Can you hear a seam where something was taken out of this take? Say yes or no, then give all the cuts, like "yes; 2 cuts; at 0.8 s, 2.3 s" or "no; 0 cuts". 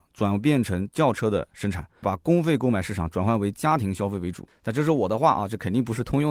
yes; 2 cuts; at 2.0 s, 4.5 s